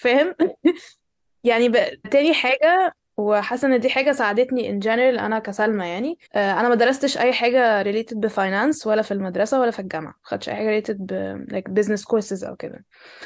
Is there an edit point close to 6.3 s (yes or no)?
yes